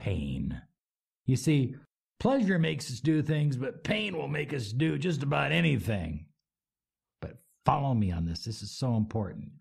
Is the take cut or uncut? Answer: uncut